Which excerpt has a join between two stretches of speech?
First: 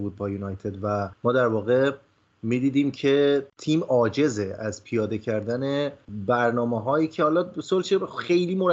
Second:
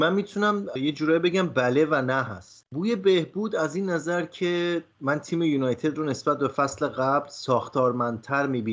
second; 1 cut; at 4.9 s

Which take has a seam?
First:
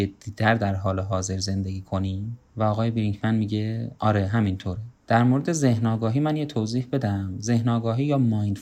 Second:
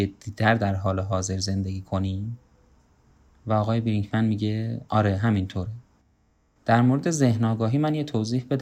first; 2 cuts; at 2.5 s, 5.0 s

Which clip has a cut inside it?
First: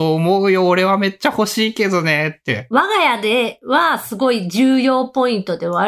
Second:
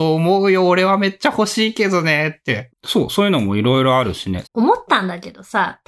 second; 2 cuts; at 2.7 s, 4.4 s

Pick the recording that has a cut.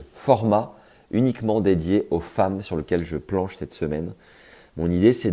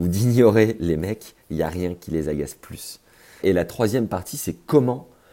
second; 1 cut; at 3.4 s

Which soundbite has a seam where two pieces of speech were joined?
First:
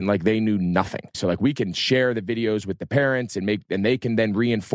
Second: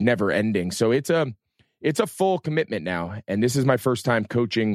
first; 1 cut; at 1.1 s

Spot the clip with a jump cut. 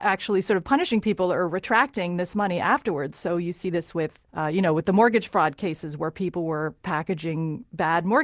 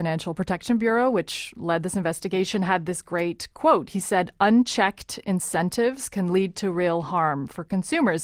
first; 1 cut; at 4.3 s

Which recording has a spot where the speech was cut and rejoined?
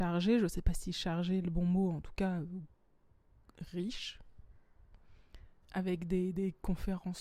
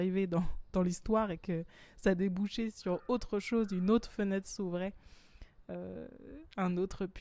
first; 1 cut; at 5.6 s

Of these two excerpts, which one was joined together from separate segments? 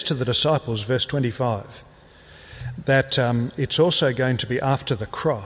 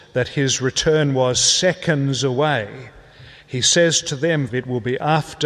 second; 1 cut; at 4.5 s

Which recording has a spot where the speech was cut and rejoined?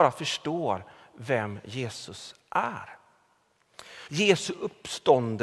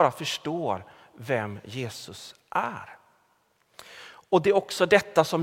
first; 1 cut; at 4.1 s

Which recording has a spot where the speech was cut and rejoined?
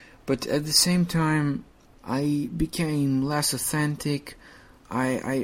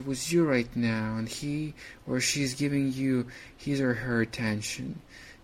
first; 1 cut; at 1.9 s

